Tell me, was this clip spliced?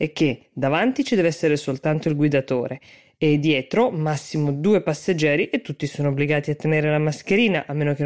no; 0 cuts

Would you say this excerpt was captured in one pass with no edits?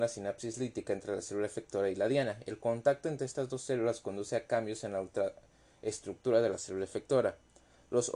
yes; 0 cuts

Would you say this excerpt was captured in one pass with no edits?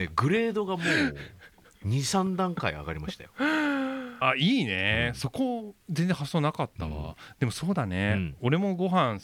no; 3 cuts; at 4.2 s, 5.8 s, 7.3 s

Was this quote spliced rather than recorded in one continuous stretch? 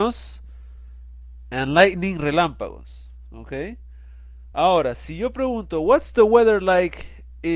no; 0 cuts

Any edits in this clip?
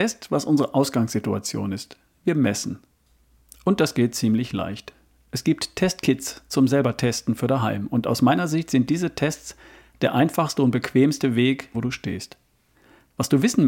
yes; 1 cut; at 11.7 s

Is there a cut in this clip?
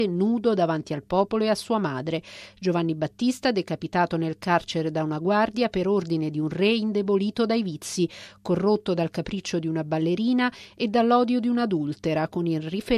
no; 0 cuts

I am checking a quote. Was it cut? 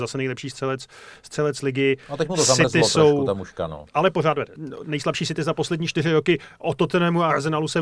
no; 0 cuts

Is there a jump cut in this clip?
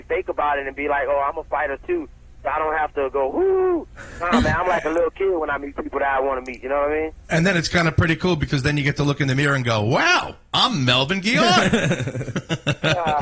no; 0 cuts

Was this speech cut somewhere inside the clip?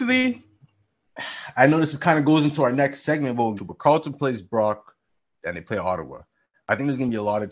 yes; 2 cuts; at 3.6 s, 5.3 s

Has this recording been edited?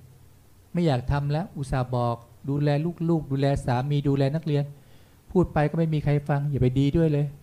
no; 0 cuts

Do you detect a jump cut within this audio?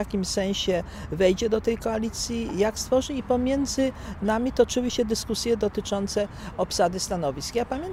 no; 0 cuts

